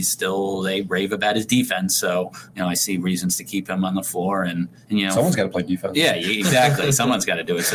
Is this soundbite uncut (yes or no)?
yes